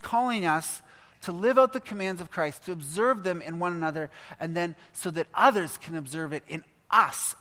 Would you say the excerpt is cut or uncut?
uncut